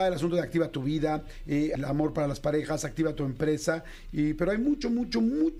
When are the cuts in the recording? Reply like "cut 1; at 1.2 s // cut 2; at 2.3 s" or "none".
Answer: cut 1; at 1.8 s